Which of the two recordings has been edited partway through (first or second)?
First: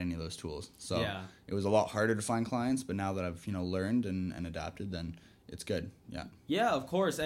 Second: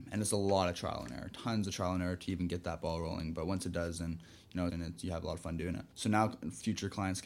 second